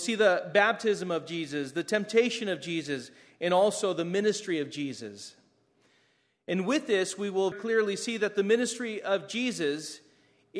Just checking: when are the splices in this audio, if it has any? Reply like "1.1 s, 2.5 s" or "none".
7.5 s